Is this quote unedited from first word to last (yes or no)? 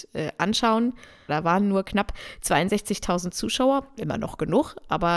no